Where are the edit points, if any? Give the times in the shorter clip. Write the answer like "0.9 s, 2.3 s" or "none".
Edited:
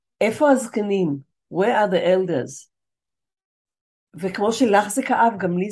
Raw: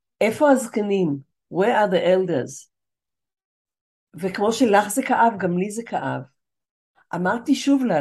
none